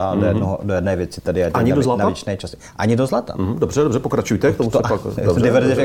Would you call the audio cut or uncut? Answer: uncut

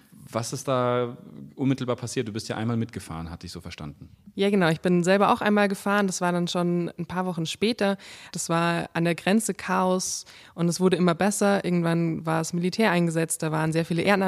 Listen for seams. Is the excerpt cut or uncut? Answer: cut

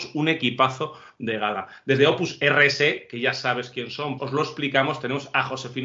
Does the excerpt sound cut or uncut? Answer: cut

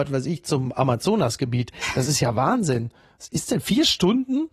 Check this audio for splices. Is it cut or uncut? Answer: uncut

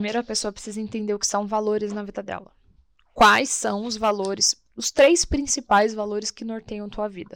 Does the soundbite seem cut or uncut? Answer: uncut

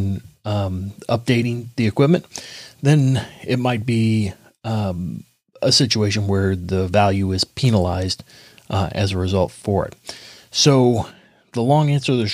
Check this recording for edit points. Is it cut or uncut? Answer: uncut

